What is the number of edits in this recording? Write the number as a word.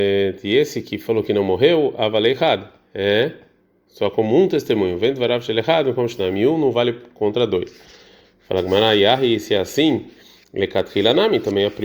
zero